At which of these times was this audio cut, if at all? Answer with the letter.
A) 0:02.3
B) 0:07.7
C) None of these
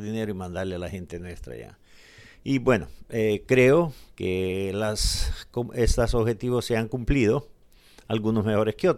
C